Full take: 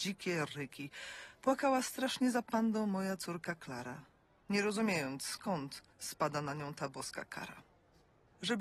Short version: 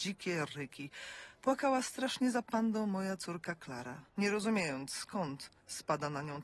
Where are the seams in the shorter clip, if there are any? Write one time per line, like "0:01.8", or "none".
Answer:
0:04.1